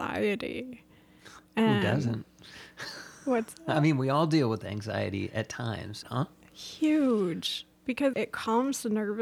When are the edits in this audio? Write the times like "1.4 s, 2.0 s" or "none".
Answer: 6.0 s, 8.1 s